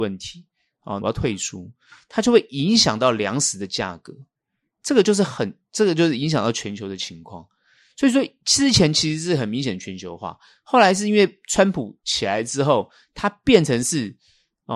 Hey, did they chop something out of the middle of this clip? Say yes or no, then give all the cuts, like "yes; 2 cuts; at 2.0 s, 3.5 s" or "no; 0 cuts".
yes; 1 cut; at 1.0 s